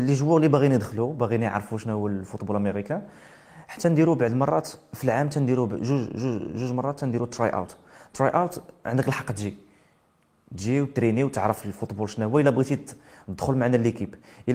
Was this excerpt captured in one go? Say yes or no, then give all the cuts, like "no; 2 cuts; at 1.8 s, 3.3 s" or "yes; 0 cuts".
yes; 0 cuts